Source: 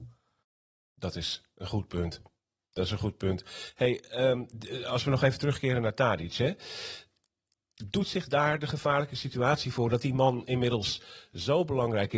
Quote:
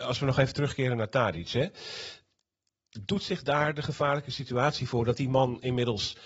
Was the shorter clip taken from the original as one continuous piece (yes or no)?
yes